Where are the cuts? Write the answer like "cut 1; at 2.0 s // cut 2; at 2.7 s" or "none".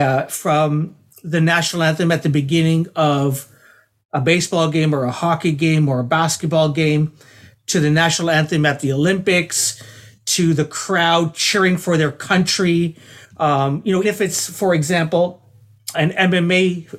cut 1; at 14.0 s // cut 2; at 15.9 s